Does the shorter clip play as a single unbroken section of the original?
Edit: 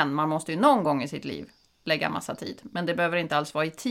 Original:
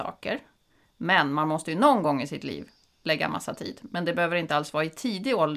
yes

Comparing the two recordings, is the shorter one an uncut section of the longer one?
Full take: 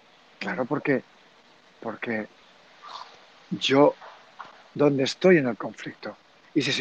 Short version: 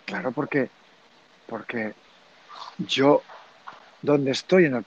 no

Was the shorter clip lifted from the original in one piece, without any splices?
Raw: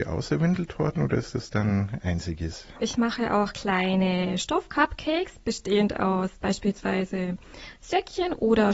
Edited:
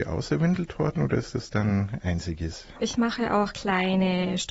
yes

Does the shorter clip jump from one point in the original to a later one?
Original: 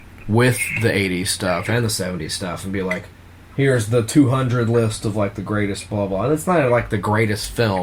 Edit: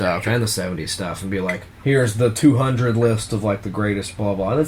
yes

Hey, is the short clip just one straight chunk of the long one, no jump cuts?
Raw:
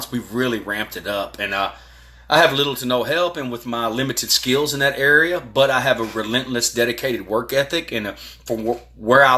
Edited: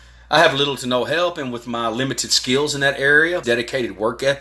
no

